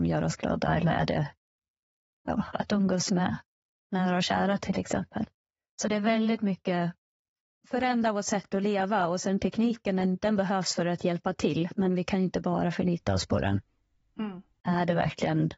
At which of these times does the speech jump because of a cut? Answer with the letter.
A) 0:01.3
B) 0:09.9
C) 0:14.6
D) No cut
C